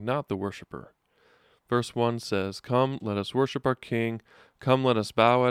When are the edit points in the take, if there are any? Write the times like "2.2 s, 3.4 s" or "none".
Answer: none